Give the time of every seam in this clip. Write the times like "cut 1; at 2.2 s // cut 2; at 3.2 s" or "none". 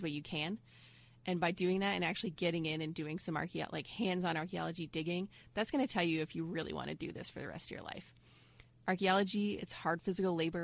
cut 1; at 9.6 s